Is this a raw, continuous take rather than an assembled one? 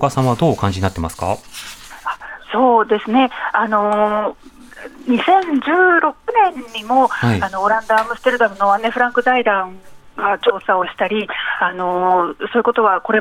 yes; 0 cuts

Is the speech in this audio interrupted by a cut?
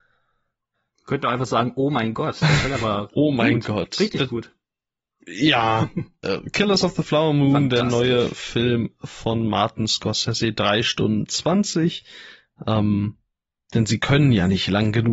no; 0 cuts

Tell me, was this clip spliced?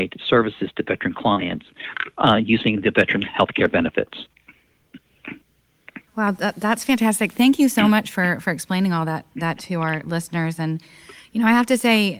yes; 1 cut; at 6.1 s

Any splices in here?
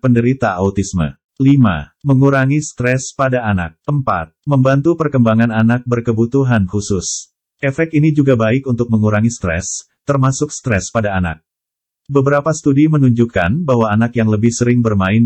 yes; 2 cuts; at 3.8 s, 7.5 s

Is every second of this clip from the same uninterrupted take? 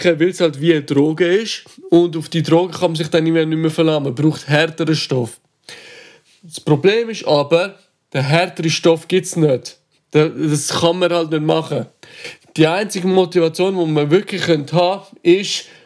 yes; 0 cuts

